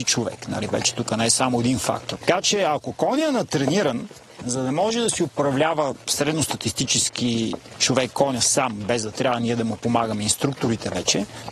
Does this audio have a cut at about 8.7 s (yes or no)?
no